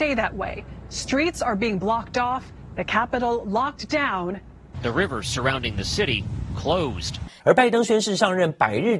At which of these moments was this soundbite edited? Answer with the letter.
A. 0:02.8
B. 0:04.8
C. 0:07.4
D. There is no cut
C